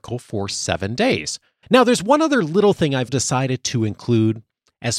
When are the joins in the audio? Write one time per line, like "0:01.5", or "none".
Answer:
0:01.6
0:03.1